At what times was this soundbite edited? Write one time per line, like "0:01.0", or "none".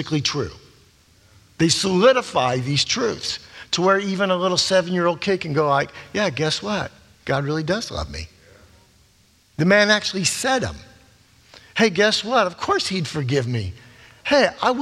none